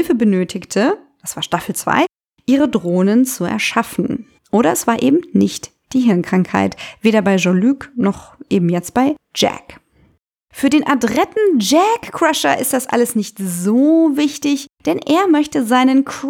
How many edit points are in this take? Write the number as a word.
one